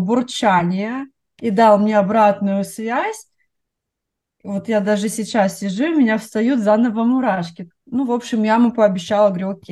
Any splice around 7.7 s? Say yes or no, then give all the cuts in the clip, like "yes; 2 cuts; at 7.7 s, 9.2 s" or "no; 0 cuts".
yes; 1 cut; at 7.7 s